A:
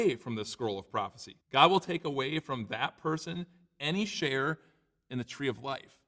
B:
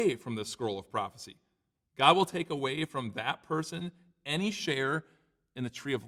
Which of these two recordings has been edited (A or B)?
A